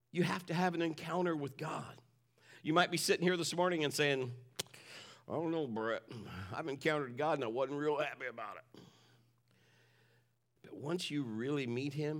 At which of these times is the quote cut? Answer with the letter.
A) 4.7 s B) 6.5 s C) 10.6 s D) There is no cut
C